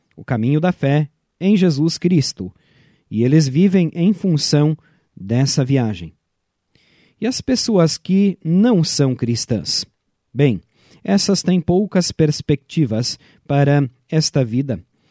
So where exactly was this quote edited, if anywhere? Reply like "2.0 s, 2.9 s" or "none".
none